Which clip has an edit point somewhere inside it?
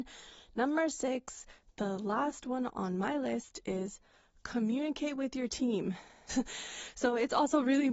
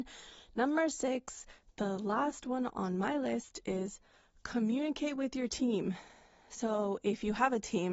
first; 1 cut; at 6.3 s

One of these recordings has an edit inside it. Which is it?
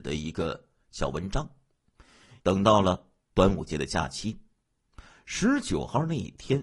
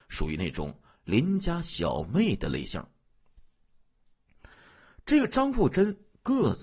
first; 1 cut; at 2.4 s

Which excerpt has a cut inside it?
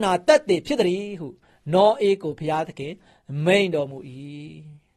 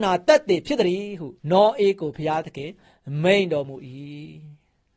second; 1 cut; at 1.4 s

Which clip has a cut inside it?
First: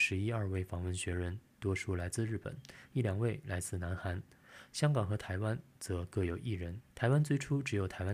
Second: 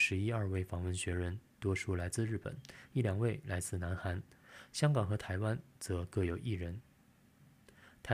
first; 1 cut; at 6.9 s

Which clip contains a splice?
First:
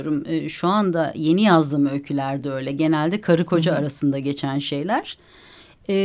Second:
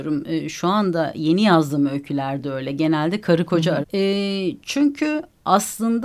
second; 1 cut; at 3.8 s

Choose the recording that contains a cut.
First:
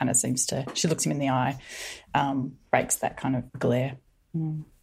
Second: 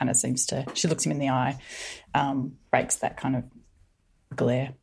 first; 1 cut; at 3.5 s

